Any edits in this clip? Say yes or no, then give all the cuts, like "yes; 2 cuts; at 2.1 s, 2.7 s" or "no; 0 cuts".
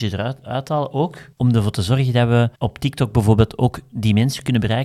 yes; 2 cuts; at 1.3 s, 2.5 s